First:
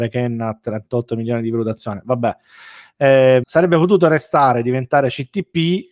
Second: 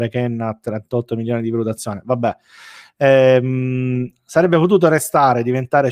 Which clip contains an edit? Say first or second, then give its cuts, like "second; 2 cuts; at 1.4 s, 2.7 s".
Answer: first; 1 cut; at 3.4 s